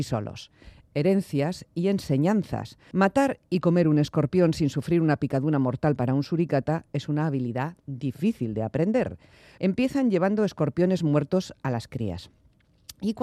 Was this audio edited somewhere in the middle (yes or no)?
yes